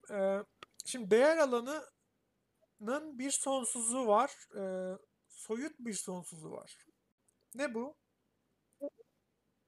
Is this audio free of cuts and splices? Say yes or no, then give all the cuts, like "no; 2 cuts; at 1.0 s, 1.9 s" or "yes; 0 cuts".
yes; 0 cuts